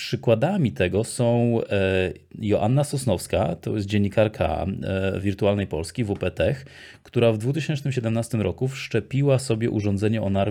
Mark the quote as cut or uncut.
uncut